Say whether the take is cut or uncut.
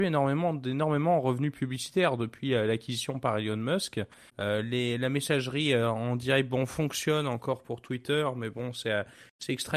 cut